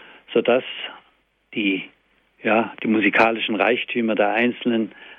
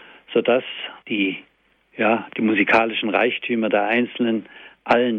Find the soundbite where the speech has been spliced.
second; 1 cut; at 1.0 s

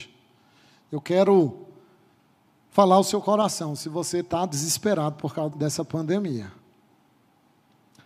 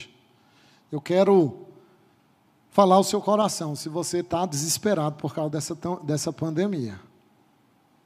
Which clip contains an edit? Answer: first; 1 cut; at 5.5 s

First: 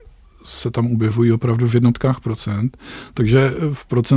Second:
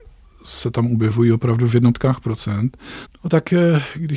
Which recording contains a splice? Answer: second; 1 cut; at 3.1 s

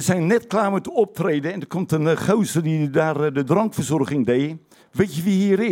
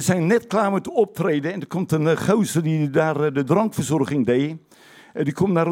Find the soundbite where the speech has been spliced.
first; 1 cut; at 4.8 s

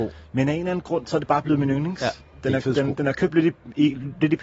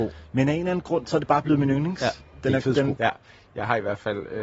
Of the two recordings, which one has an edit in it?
second; 1 cut; at 3.0 s

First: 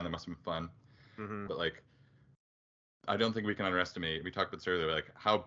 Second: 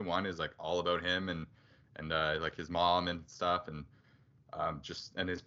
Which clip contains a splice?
first; 1 cut; at 1.5 s

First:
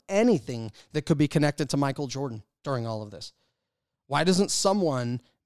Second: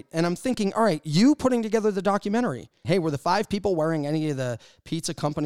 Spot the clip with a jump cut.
second; 1 cut; at 2.8 s

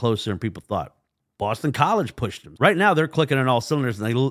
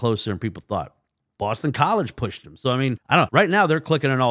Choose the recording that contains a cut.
first; 1 cut; at 2.6 s

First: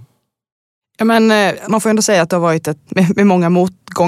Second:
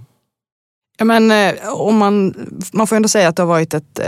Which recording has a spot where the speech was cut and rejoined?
first; 2 cuts; at 1.6 s, 2.9 s

